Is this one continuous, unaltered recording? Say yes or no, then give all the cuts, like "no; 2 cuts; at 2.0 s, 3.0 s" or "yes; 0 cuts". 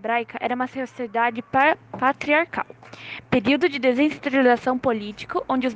yes; 0 cuts